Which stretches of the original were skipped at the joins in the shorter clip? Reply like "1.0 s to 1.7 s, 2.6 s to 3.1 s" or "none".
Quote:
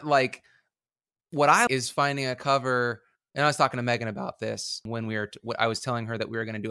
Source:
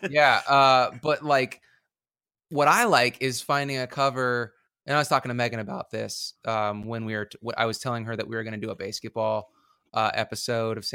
2.9 s to 3.2 s, 6.4 s to 6.8 s